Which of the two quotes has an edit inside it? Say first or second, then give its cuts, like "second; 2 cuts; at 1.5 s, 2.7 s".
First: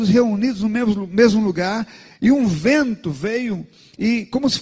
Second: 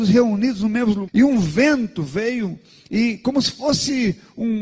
second; 1 cut; at 1.1 s